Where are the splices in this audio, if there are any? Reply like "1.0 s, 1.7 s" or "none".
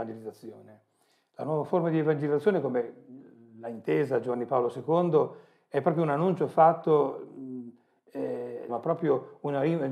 8.7 s